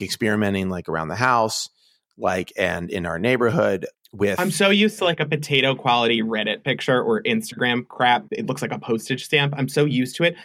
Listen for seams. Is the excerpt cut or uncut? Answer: cut